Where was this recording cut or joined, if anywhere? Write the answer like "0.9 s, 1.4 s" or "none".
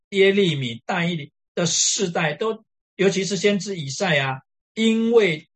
4.6 s